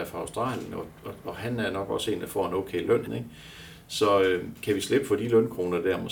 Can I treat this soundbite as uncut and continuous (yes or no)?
no